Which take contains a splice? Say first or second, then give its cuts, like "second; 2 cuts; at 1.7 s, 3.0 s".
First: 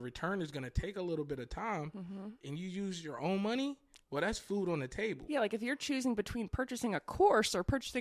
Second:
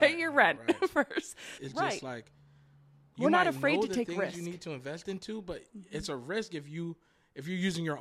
second; 1 cut; at 1.6 s